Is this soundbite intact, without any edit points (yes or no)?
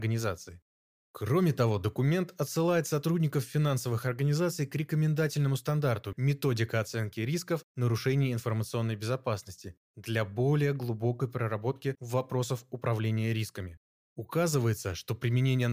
no